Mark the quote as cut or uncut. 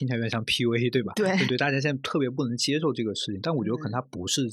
cut